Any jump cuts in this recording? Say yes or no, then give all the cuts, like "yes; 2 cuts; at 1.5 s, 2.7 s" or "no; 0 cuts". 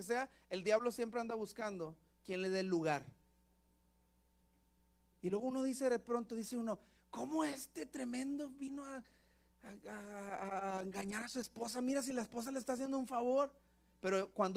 no; 0 cuts